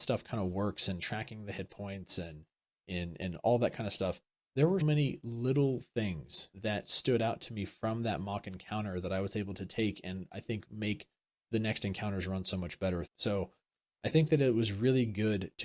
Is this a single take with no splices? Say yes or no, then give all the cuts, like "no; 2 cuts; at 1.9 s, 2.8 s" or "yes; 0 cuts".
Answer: no; 3 cuts; at 4.8 s, 6.5 s, 13.1 s